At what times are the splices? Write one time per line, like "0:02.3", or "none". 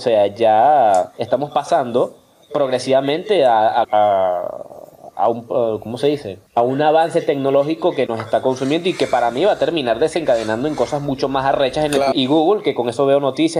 0:03.8
0:06.5
0:12.1